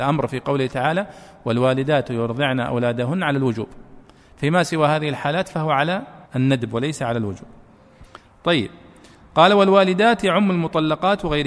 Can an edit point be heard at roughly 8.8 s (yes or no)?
no